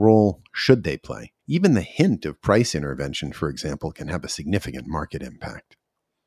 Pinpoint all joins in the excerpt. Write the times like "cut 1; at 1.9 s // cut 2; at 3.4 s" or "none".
cut 1; at 1.4 s